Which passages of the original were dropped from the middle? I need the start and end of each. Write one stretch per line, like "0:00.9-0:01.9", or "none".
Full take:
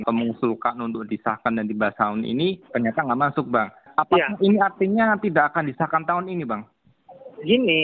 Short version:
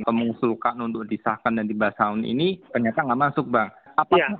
none